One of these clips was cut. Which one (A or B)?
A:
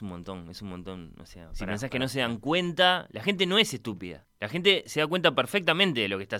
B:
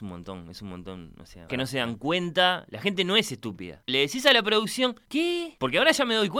B